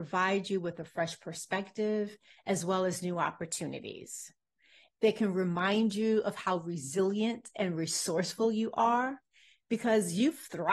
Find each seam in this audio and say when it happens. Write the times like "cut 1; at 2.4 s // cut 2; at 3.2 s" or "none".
none